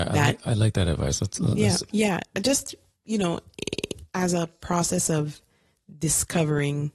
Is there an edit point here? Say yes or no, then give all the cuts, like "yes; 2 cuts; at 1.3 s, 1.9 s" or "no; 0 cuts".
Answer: yes; 1 cut; at 1.9 s